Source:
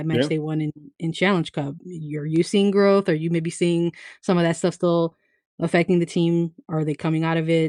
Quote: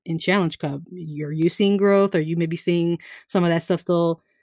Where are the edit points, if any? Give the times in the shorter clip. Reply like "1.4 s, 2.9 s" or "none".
none